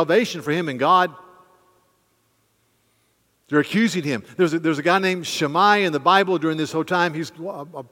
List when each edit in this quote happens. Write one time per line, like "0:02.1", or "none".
none